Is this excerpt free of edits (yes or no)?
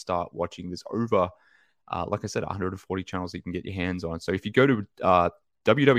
yes